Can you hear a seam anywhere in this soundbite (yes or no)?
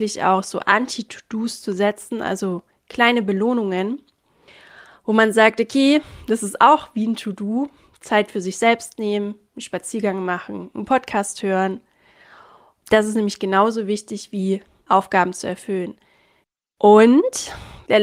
no